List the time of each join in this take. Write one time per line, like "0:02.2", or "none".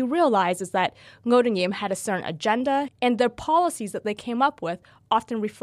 0:02.9